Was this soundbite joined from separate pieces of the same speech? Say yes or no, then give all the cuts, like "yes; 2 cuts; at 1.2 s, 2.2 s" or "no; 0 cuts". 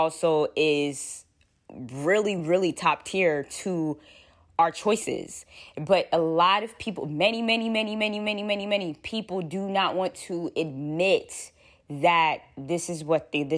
no; 0 cuts